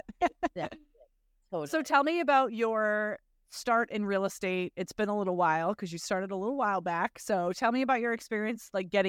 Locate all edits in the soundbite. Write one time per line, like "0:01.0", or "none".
none